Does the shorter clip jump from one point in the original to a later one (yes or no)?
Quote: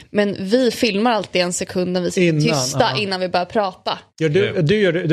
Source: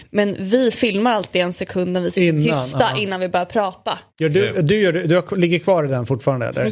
no